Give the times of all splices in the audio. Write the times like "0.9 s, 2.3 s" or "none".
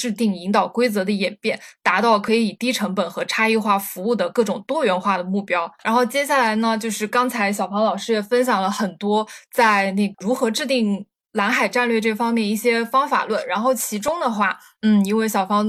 none